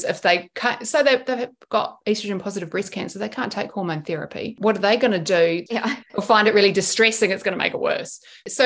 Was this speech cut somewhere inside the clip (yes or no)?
yes